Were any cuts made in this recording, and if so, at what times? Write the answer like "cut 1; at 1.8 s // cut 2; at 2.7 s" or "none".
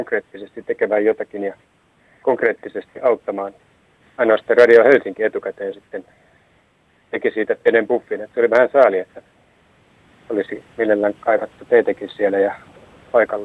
cut 1; at 4.0 s